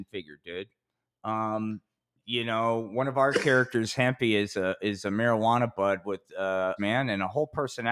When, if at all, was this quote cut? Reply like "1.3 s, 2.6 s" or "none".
6.8 s